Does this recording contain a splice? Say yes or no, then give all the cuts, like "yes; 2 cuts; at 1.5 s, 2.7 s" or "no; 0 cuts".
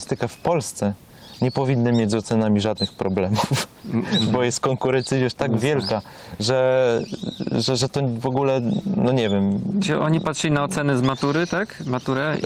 no; 0 cuts